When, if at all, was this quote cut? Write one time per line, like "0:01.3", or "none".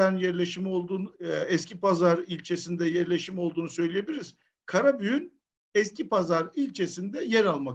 0:01.1